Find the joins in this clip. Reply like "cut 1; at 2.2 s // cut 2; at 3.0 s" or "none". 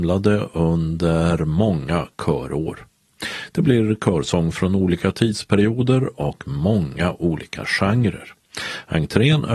none